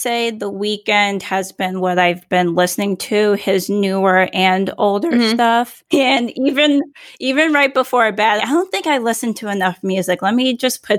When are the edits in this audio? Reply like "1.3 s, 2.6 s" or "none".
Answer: 5.9 s, 8.4 s